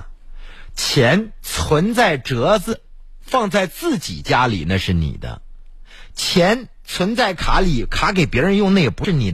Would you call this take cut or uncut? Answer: uncut